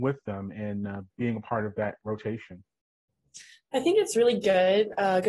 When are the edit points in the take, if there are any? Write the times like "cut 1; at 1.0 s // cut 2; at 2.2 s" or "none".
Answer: none